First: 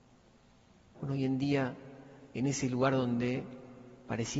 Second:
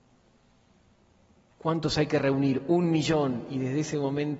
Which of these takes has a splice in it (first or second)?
first